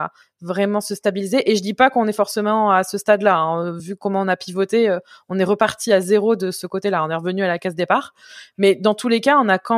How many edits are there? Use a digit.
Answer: 0